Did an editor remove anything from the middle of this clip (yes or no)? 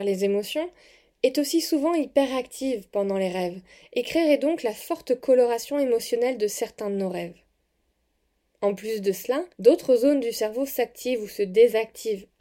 yes